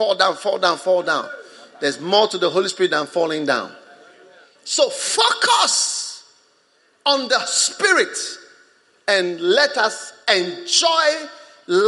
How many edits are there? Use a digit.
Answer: 1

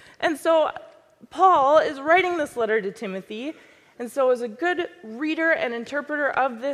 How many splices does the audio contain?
1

